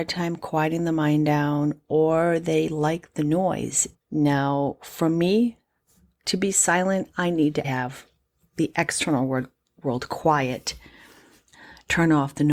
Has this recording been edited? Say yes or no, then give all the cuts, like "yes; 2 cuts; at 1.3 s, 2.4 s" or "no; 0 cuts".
yes; 2 cuts; at 3.9 s, 7.6 s